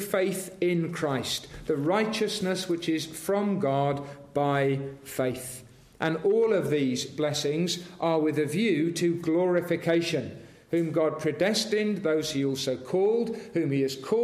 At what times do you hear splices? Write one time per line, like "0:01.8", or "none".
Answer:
none